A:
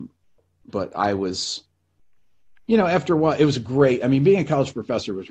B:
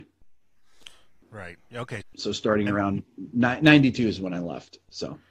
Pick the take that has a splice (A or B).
B